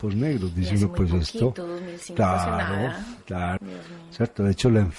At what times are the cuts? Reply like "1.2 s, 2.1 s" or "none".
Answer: 3.6 s